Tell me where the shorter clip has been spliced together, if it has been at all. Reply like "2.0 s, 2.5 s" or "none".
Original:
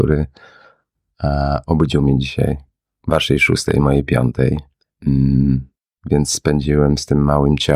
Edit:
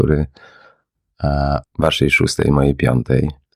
1.6 s